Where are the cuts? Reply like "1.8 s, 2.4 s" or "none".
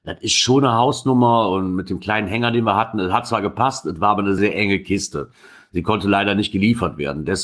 4.4 s